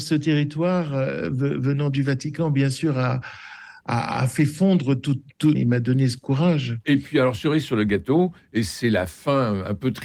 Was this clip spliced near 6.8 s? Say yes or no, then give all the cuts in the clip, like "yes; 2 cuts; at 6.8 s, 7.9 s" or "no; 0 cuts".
no; 1 cut; at 5.6 s